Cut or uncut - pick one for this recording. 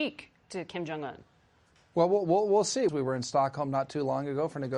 cut